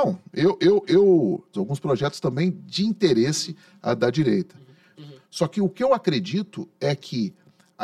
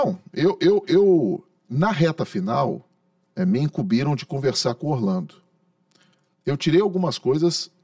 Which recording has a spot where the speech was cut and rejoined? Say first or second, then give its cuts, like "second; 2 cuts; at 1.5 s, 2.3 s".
first; 2 cuts; at 1.5 s, 5.0 s